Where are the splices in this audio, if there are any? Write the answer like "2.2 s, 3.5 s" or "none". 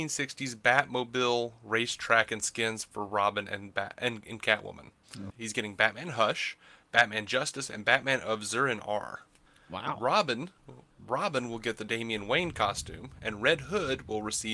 5.3 s